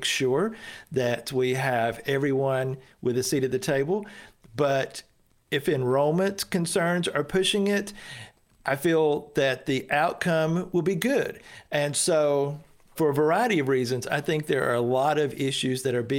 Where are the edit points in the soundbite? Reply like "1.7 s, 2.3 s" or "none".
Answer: none